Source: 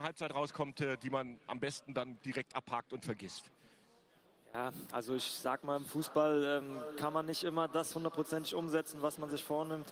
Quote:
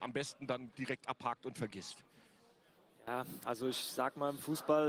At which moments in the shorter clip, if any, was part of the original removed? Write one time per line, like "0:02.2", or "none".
none